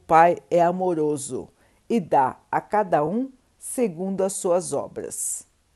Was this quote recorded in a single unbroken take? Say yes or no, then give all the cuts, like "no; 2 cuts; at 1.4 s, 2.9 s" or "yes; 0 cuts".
yes; 0 cuts